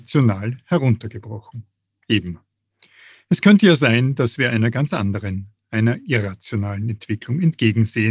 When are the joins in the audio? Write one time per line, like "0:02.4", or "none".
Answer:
none